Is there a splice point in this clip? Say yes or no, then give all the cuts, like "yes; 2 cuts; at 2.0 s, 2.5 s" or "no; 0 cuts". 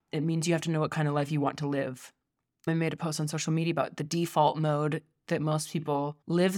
no; 0 cuts